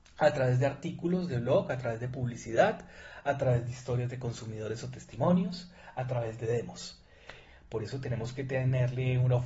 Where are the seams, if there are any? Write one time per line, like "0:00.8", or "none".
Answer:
0:07.5